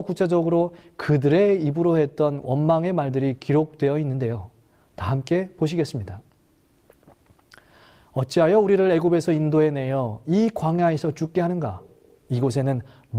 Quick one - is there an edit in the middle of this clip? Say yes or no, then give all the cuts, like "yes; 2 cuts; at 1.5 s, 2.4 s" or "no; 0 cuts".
no; 0 cuts